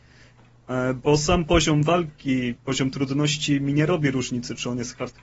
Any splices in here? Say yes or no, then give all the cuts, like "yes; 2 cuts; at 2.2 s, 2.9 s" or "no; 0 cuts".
no; 0 cuts